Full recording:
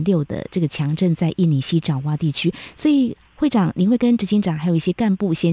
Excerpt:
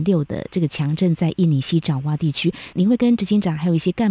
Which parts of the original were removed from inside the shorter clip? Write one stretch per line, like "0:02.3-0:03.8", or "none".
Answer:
0:02.7-0:03.7